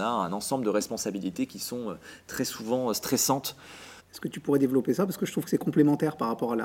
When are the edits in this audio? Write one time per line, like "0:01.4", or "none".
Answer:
0:04.0